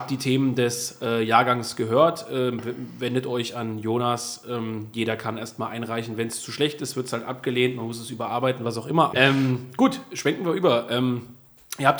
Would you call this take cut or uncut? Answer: cut